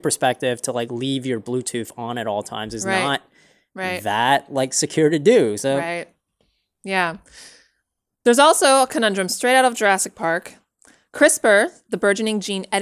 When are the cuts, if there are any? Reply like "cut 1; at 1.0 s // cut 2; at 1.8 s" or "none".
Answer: none